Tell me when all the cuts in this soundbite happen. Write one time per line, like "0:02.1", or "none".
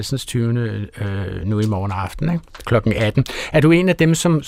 none